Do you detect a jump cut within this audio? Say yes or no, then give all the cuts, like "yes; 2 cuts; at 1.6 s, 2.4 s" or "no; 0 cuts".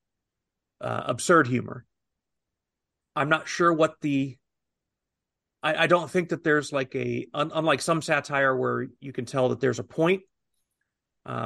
no; 0 cuts